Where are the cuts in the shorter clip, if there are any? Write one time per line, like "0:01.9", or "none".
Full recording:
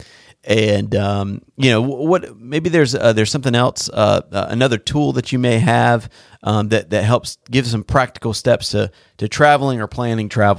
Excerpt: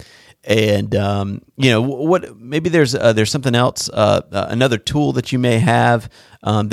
none

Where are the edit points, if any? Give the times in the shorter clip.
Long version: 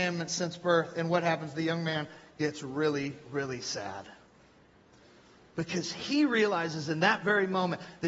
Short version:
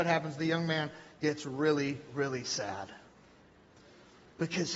none

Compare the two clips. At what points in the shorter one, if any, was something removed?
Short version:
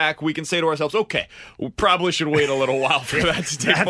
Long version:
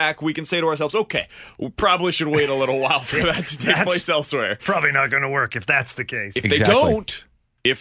none

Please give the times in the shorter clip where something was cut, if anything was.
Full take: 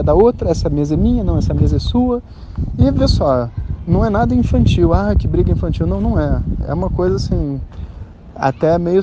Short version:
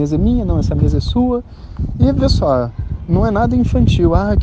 none

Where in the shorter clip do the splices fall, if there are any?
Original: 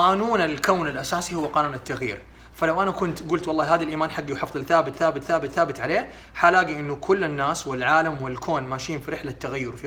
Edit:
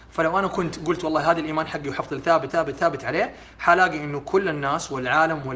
0:02.5

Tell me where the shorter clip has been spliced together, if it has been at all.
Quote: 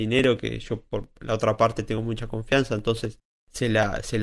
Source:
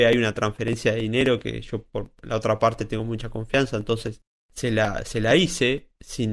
none

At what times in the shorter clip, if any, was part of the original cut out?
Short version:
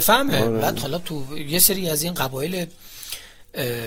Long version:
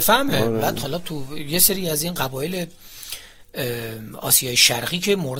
none

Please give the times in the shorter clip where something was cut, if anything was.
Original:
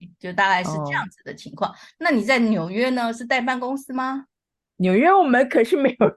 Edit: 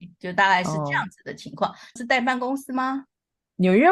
0:02.0

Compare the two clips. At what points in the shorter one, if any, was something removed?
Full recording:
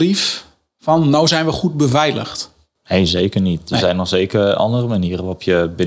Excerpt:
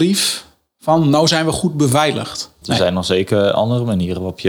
0:02.6

